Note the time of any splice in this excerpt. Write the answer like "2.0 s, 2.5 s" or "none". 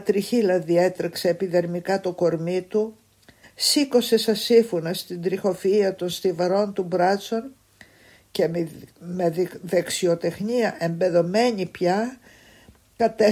3.4 s